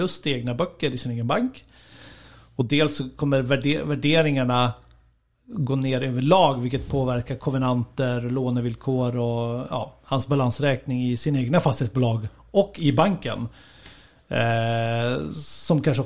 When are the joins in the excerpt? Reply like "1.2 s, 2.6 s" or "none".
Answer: none